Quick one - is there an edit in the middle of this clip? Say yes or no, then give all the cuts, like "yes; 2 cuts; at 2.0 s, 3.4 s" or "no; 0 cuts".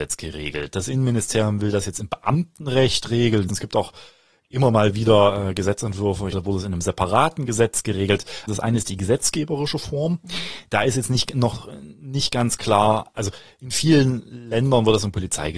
yes; 3 cuts; at 3.5 s, 6.3 s, 8.5 s